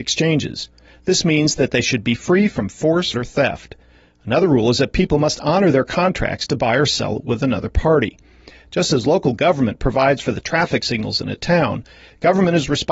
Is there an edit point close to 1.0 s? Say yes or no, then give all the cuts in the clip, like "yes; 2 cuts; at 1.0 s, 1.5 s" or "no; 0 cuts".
no; 1 cut; at 3.1 s